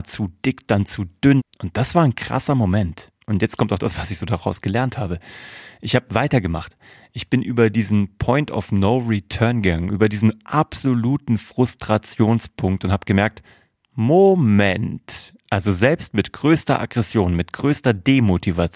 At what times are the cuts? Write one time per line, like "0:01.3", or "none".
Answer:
0:01.4